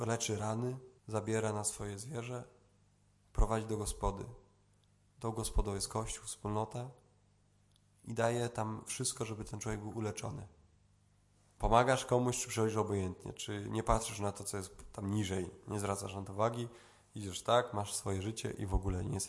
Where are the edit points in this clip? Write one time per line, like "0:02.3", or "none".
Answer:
0:01.0
0:11.6